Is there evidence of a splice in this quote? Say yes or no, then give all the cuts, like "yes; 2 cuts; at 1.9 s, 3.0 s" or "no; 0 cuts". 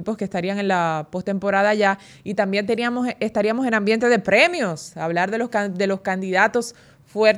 no; 0 cuts